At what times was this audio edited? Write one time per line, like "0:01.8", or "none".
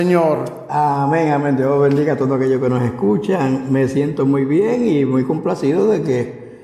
none

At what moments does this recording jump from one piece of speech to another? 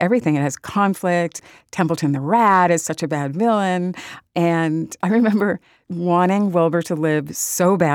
0:05.9

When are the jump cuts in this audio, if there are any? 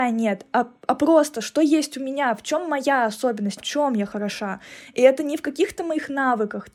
0:03.6

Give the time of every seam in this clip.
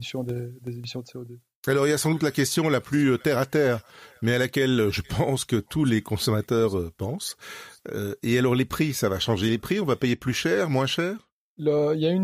none

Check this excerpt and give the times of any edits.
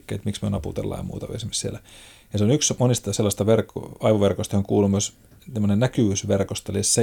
none

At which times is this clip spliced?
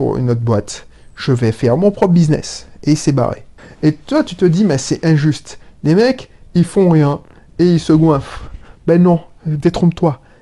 none

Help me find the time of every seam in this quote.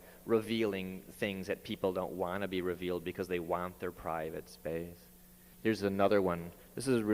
0:05.5

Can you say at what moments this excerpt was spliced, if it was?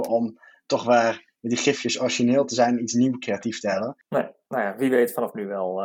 0:04.0

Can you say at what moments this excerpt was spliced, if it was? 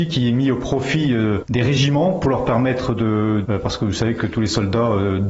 0:03.4

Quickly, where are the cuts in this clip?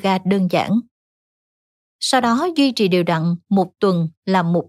0:01.8

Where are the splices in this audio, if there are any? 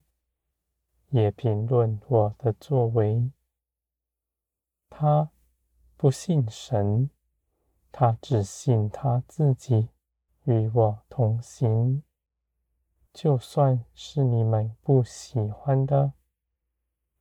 0:10.3
0:13.1

